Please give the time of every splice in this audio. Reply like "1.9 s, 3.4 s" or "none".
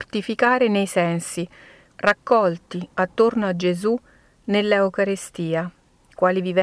1.9 s